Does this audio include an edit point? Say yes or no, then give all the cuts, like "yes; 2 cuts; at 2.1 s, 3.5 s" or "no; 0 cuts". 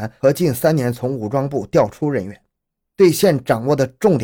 no; 0 cuts